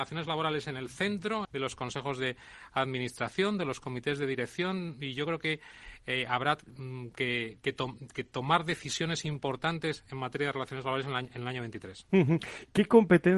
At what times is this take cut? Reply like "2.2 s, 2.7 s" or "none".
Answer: 1.4 s